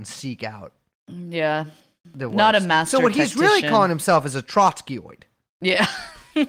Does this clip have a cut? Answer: no; 0 cuts

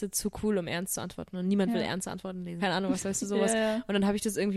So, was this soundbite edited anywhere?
yes; 1 cut; at 2.6 s

